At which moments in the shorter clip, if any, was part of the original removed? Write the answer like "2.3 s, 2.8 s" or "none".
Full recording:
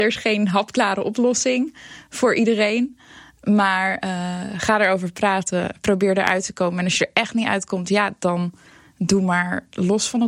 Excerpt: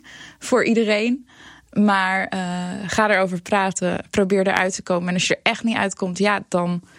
none

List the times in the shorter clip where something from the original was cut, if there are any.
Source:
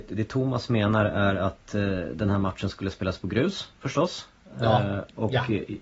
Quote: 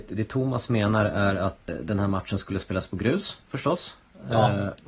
1.7 s

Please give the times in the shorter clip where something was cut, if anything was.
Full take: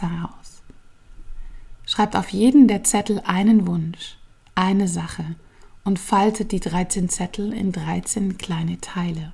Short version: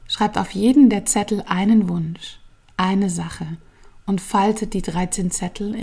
none

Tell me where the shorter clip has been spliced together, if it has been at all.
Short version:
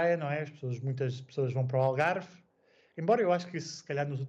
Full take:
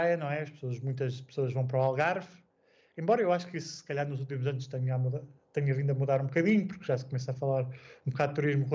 none

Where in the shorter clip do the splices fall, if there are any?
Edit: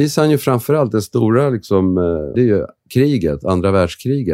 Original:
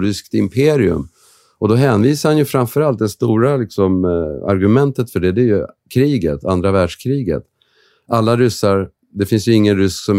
2.3 s

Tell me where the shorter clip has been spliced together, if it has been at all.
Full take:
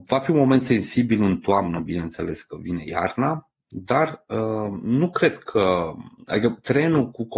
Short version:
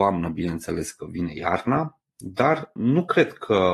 2.8 s

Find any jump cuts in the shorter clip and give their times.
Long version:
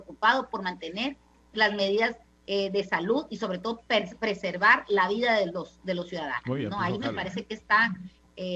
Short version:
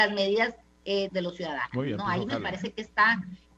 1.1 s

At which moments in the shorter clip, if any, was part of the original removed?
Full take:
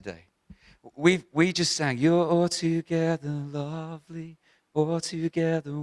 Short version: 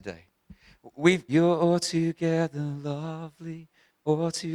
1.3 s

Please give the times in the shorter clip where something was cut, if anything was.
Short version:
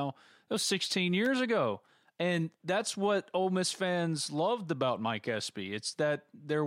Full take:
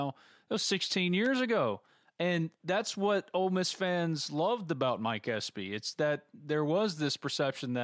none

